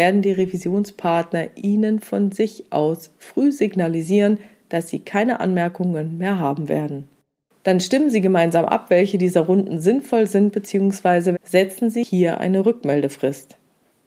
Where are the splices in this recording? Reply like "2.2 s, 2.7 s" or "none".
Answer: 11.3 s